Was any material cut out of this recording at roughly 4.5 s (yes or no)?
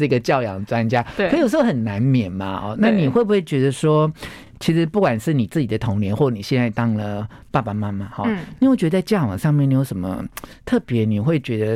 no